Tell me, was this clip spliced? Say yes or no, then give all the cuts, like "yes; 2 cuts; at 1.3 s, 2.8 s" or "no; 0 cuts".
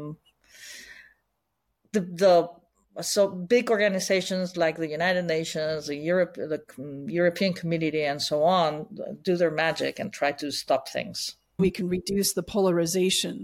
yes; 1 cut; at 11.6 s